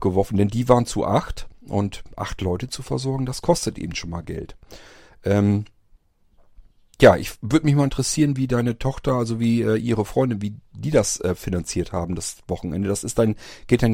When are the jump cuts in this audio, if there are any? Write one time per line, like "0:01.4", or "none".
none